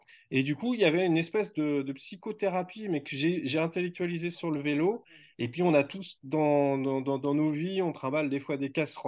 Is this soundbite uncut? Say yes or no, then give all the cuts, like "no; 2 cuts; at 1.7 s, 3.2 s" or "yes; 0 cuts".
yes; 0 cuts